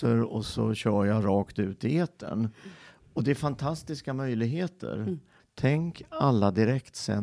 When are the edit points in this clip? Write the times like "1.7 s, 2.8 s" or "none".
5.4 s